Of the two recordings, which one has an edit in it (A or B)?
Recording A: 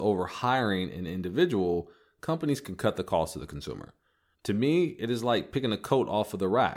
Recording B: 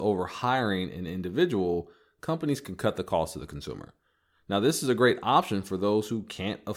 A